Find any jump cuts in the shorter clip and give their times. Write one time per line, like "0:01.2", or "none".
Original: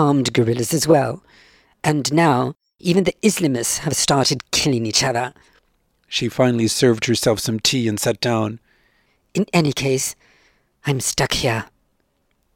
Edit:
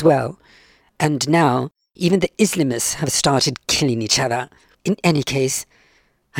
0:04.7